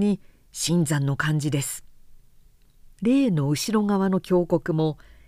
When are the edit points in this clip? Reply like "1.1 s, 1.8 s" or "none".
none